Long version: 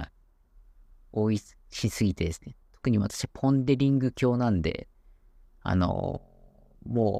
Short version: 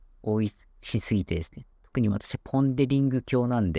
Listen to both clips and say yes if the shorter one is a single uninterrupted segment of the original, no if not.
yes